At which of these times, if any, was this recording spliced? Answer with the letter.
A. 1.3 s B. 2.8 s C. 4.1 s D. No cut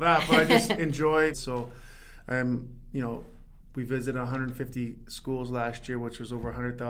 A